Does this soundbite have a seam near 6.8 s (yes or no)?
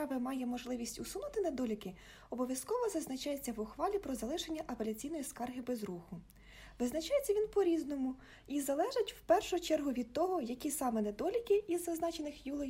no